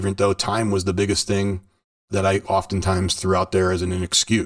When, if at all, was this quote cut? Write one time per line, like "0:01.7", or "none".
0:02.1